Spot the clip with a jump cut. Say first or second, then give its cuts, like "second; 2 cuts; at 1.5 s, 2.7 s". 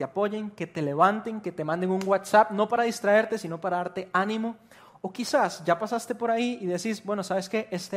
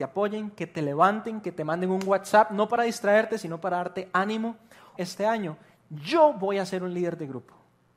second; 1 cut; at 5.0 s